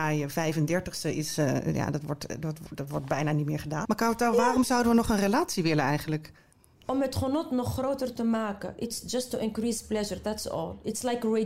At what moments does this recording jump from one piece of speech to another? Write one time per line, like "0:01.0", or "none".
0:03.8